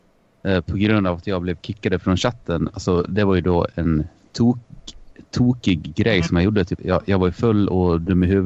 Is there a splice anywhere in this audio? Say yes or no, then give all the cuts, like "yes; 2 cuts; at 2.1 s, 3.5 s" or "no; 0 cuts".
yes; 1 cut; at 6.8 s